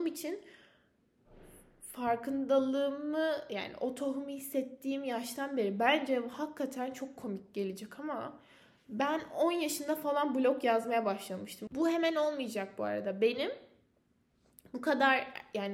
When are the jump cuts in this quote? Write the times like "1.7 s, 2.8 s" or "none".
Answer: 11.7 s